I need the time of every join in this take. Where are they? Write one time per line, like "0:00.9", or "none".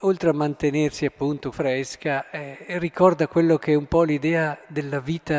0:01.5